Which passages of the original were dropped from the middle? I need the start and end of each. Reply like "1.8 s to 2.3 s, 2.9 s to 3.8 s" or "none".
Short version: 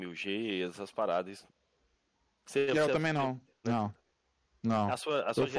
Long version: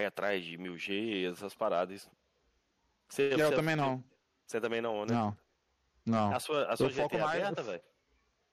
4.3 s to 5.1 s